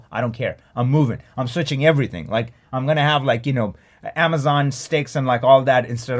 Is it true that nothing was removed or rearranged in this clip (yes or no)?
yes